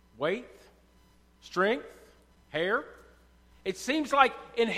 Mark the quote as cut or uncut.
cut